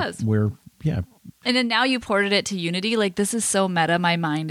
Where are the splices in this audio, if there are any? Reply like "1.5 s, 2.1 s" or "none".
1.4 s